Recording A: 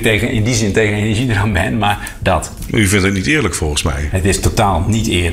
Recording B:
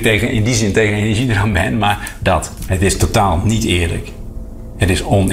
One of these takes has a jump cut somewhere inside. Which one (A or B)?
B